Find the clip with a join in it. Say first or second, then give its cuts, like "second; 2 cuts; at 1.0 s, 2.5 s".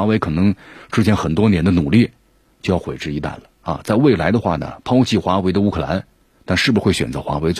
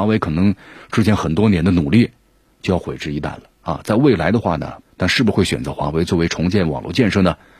second; 1 cut; at 4.8 s